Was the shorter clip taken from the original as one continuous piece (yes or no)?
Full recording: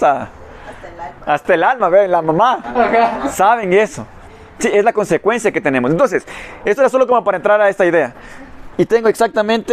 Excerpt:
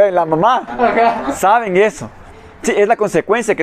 yes